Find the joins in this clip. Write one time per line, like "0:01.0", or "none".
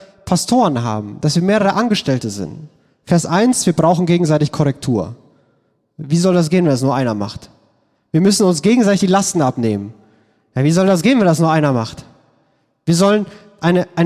none